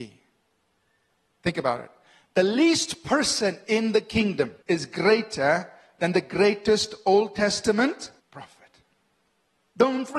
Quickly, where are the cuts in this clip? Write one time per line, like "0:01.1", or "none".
0:04.6
0:08.2